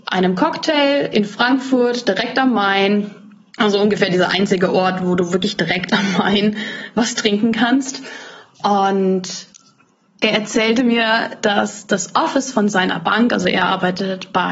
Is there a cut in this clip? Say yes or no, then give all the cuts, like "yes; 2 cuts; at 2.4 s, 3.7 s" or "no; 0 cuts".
no; 0 cuts